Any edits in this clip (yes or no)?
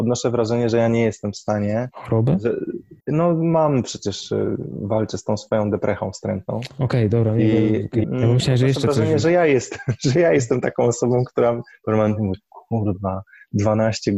yes